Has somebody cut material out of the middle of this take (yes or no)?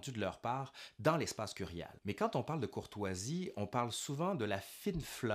no